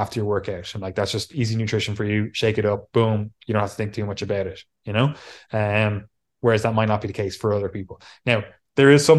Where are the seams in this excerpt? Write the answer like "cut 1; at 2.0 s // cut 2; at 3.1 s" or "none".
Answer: none